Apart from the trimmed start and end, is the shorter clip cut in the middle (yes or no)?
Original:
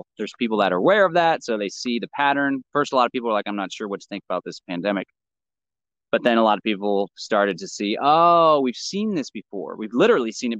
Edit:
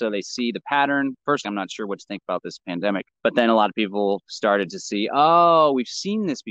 yes